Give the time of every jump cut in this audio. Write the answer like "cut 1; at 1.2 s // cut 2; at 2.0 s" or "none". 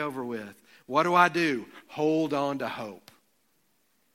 none